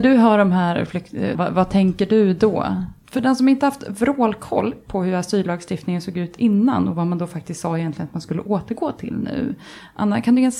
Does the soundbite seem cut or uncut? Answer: cut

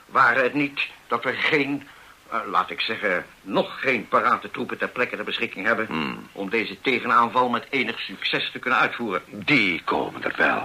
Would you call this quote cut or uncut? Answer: uncut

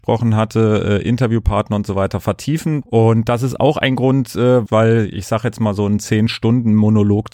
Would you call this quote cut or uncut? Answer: cut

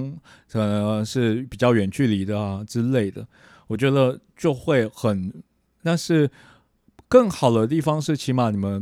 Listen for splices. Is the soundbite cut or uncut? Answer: cut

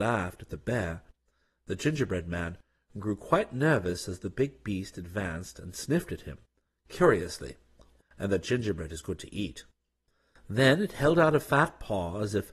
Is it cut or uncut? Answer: cut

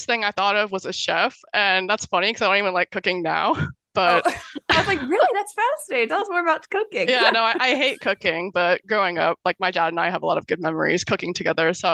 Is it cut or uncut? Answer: uncut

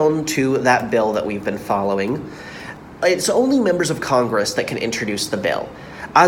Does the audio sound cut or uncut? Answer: uncut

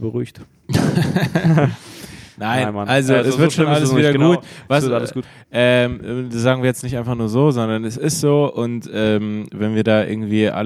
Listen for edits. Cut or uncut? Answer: uncut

